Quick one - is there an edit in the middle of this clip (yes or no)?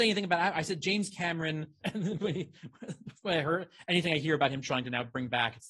yes